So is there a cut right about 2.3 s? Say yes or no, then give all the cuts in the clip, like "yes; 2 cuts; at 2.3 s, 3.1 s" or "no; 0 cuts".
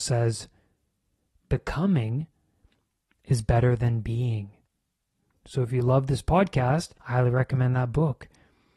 no; 2 cuts; at 5.3 s, 7.0 s